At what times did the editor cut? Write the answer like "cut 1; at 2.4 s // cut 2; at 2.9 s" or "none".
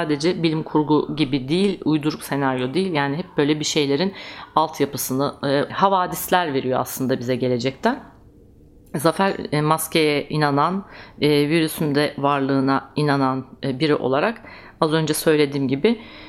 cut 1; at 5.7 s

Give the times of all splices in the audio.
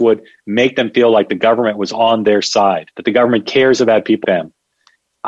cut 1; at 2.9 s // cut 2; at 4.2 s

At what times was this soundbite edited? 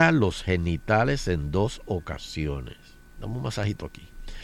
cut 1; at 3.2 s

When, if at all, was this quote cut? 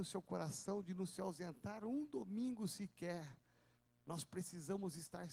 none

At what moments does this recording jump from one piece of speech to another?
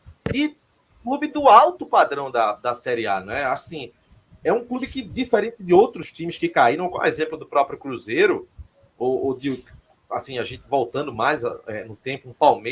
none

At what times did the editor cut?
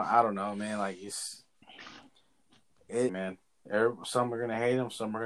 cut 1; at 3.1 s

